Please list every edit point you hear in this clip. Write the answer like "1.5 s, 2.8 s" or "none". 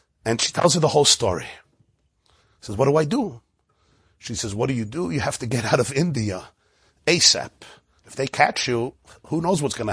8.0 s